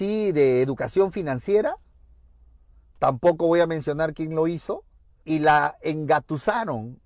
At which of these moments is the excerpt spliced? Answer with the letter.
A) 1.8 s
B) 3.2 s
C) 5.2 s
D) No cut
C